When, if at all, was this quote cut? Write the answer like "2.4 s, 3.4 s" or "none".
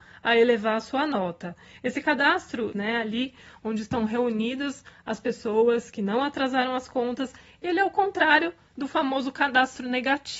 2.7 s

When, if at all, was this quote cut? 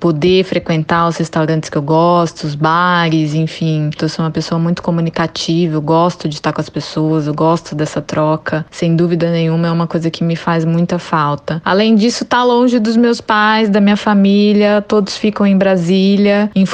4.0 s

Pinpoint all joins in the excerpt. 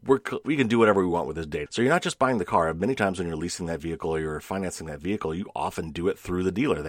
1.7 s

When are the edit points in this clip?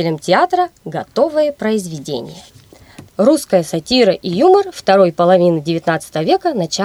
3.1 s

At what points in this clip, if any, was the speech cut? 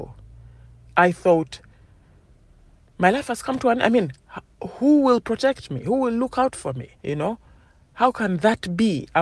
7.0 s

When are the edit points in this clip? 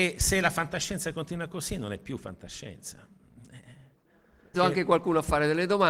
4.5 s

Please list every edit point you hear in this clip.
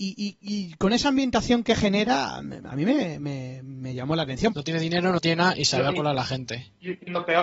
4.5 s

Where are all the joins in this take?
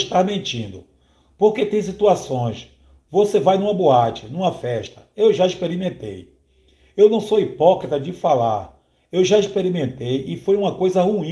none

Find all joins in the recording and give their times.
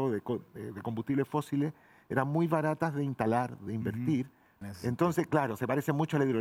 4.6 s

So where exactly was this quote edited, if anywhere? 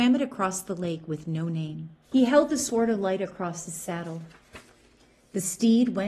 2.0 s

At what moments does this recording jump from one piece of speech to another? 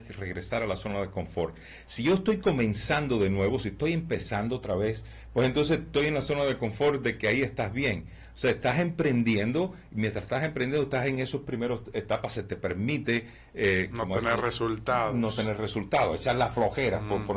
none

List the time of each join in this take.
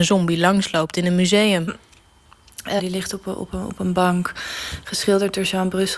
1.7 s, 2.8 s

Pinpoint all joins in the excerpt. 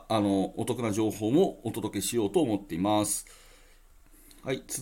none

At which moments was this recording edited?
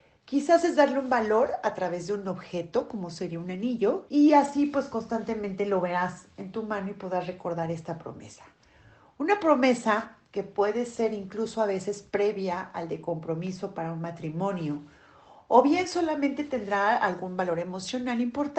4.1 s

